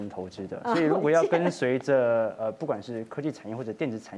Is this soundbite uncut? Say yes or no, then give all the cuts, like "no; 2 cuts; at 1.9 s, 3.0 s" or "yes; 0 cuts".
yes; 0 cuts